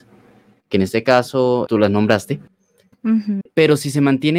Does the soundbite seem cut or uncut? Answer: cut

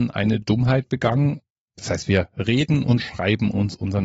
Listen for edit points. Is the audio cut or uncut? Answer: uncut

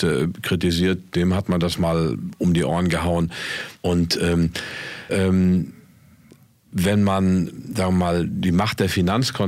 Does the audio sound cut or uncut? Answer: cut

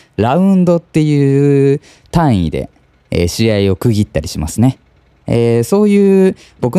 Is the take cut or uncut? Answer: uncut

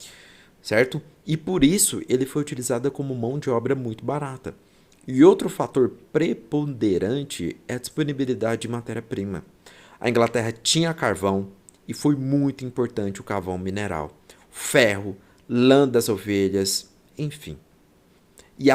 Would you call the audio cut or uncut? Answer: uncut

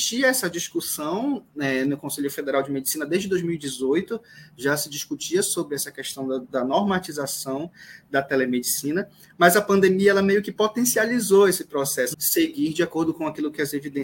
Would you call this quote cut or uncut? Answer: cut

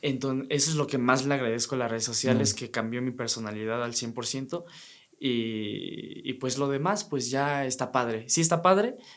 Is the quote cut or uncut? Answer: uncut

